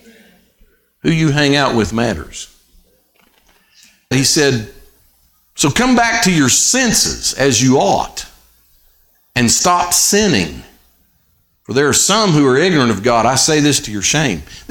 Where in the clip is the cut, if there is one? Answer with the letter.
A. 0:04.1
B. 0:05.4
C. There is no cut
A